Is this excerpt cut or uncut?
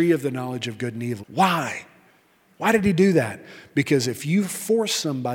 cut